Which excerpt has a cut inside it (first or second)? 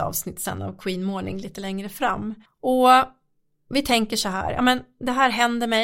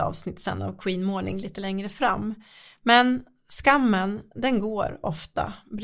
first